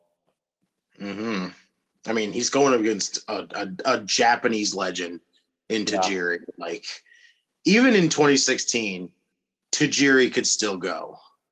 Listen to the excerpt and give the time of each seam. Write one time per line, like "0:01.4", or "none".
none